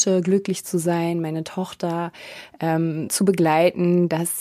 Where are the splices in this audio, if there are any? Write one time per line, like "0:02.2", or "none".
0:03.1